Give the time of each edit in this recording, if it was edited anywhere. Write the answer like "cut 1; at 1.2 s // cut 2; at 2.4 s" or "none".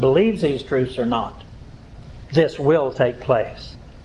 cut 1; at 2.3 s